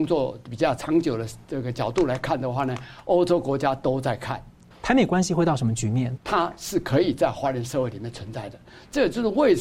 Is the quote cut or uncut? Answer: cut